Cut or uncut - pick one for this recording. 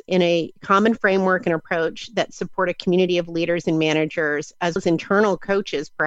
cut